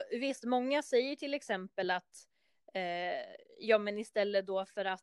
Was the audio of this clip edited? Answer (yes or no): no